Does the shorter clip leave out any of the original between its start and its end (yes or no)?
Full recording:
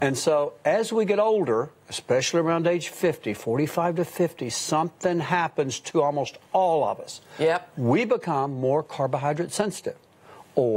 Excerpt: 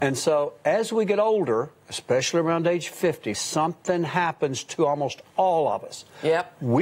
yes